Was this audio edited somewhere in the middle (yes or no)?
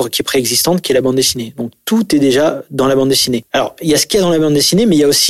no